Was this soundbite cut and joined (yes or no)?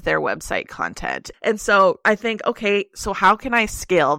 yes